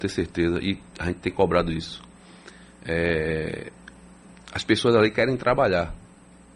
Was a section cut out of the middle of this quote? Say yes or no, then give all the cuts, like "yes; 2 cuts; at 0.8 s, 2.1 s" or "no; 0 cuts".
no; 0 cuts